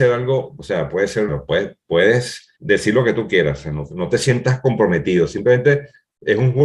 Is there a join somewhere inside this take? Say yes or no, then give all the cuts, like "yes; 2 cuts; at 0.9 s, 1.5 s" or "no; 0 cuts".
yes; 2 cuts; at 1.3 s, 2.6 s